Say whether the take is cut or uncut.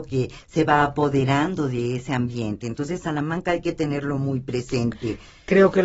uncut